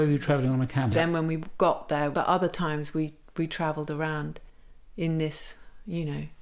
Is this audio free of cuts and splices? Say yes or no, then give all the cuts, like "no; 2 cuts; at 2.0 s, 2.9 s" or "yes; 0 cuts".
no; 2 cuts; at 0.9 s, 2.1 s